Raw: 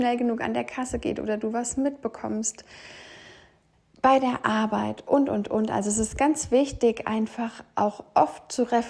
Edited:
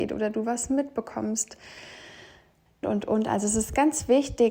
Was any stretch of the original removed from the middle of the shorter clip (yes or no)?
yes